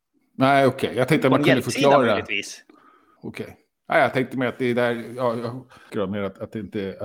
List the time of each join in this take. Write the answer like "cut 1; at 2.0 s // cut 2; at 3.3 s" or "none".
cut 1; at 5.9 s